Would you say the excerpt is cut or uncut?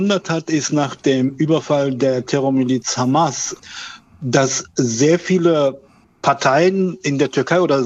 uncut